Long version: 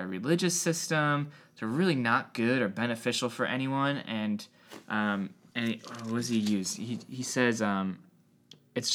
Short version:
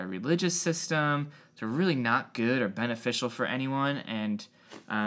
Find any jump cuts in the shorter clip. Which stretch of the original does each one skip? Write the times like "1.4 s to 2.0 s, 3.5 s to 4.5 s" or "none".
none